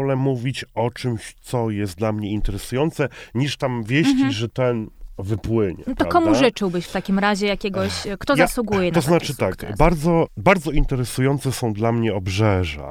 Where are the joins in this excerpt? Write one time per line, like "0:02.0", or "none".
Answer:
0:10.3